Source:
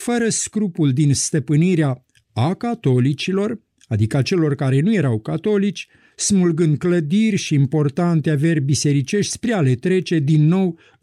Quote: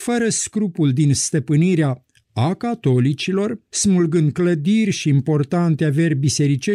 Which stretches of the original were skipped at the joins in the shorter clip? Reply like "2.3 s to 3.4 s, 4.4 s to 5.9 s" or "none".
3.7 s to 6.2 s